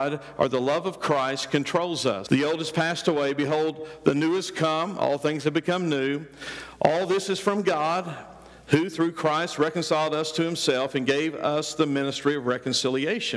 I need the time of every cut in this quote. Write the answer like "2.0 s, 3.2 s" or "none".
2.3 s